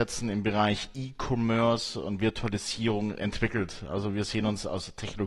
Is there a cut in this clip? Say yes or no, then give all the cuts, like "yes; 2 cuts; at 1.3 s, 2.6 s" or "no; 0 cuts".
no; 0 cuts